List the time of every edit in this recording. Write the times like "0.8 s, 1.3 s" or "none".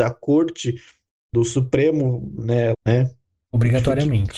2.7 s